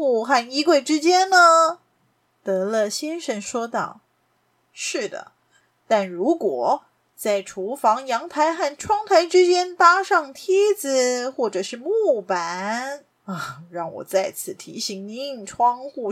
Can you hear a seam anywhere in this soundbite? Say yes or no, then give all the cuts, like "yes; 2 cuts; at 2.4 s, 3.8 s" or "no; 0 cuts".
yes; 1 cut; at 2.1 s